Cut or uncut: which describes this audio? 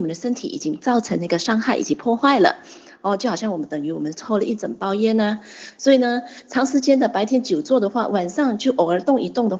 uncut